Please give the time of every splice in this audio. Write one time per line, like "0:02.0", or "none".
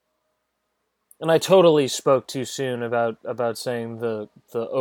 none